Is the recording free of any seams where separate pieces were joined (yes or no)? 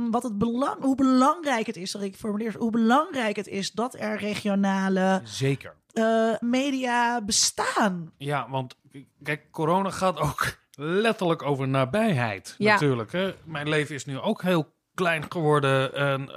no